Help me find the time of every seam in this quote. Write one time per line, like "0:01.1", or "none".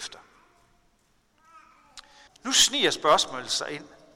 0:02.3